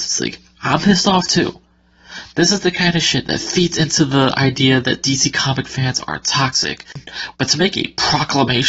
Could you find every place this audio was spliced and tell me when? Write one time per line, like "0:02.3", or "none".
0:02.3
0:07.3